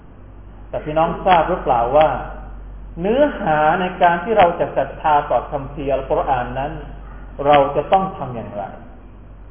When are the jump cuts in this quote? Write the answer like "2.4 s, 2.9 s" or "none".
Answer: none